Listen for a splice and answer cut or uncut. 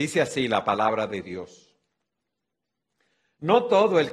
uncut